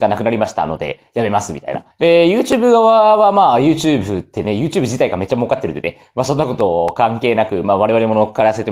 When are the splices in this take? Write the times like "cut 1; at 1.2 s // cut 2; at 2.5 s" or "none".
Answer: cut 1; at 1.9 s